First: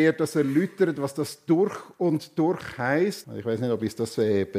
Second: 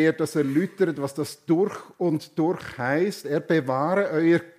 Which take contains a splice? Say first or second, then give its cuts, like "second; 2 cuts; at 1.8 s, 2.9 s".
first; 1 cut; at 3.2 s